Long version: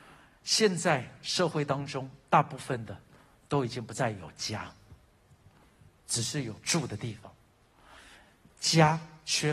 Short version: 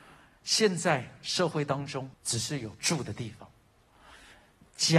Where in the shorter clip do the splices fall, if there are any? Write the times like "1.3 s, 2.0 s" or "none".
2.1 s